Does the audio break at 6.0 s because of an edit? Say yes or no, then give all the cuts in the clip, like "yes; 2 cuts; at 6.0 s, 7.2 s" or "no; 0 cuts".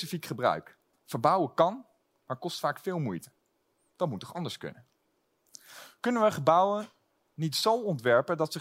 no; 1 cut; at 0.9 s